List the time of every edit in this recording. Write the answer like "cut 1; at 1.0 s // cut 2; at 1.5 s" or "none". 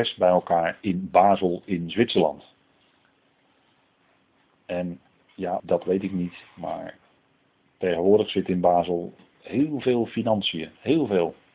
cut 1; at 5.6 s